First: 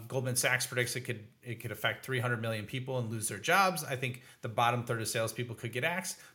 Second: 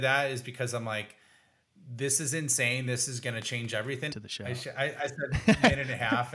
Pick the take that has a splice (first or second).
second